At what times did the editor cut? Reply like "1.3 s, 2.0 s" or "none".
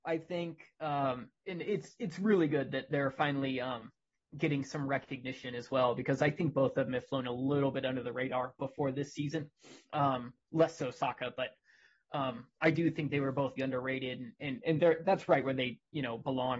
9.8 s, 13.6 s, 14.6 s